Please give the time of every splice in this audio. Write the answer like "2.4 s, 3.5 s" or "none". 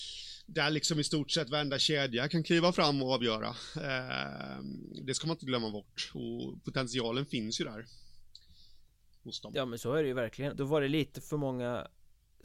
10.5 s